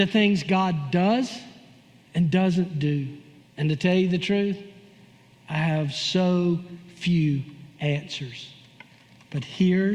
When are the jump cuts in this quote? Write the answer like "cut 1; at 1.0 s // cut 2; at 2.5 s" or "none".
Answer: cut 1; at 3.4 s